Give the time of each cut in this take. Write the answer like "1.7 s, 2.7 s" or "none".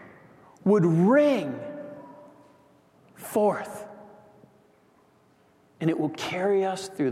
none